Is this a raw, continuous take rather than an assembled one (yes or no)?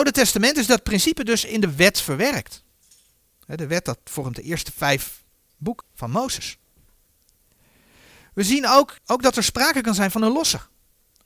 no